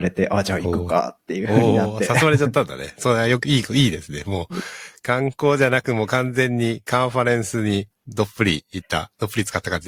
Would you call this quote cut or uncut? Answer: uncut